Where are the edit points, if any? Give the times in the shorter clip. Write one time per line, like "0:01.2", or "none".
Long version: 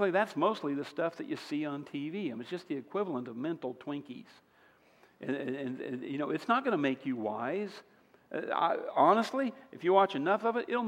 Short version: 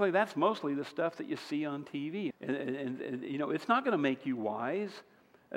0:02.3